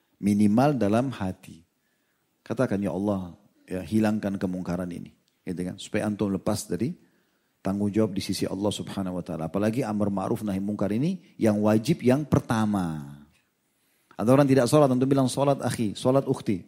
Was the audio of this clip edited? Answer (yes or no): no